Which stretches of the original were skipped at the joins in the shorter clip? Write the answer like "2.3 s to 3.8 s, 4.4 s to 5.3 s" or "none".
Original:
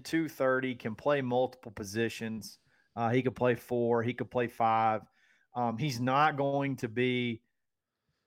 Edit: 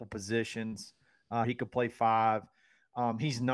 3.1 s to 4.0 s